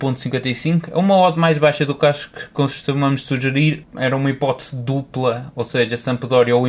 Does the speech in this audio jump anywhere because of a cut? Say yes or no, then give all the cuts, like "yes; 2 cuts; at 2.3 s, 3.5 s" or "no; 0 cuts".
yes; 1 cut; at 3.8 s